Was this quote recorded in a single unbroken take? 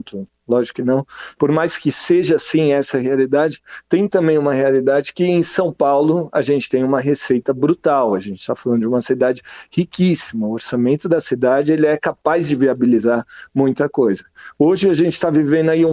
yes; 0 cuts

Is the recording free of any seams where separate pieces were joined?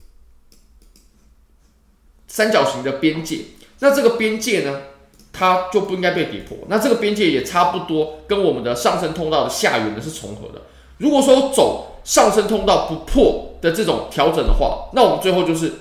yes; 0 cuts

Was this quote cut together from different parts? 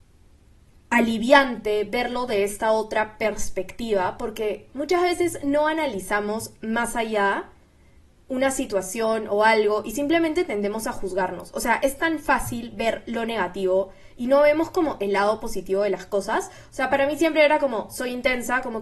no; 0 cuts

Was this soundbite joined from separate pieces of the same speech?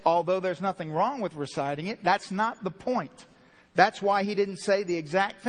no; 0 cuts

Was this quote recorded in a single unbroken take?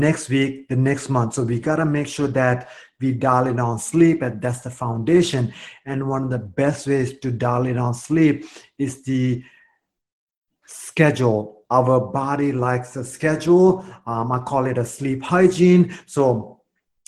yes; 0 cuts

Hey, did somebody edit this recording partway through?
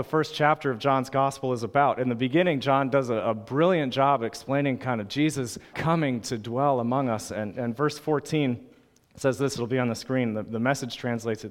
yes; 1 cut; at 5.7 s

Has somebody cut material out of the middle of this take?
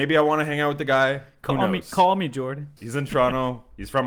yes; 1 cut; at 2.8 s

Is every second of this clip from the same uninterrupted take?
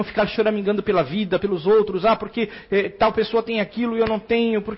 no; 1 cut; at 1.4 s

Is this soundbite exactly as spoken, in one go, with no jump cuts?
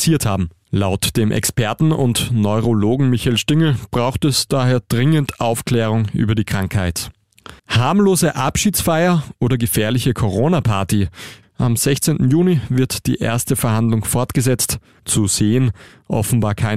no; 3 cuts; at 7.6 s, 11.4 s, 15.0 s

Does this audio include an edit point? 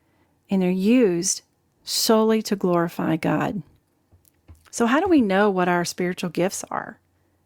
no; 0 cuts

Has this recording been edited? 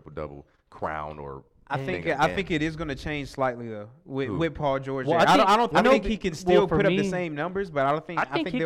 yes; 1 cut; at 5.7 s

